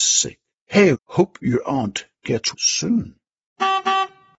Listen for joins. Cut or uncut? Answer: cut